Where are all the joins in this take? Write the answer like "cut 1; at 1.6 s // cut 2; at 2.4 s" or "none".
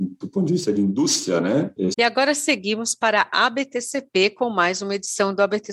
cut 1; at 1.9 s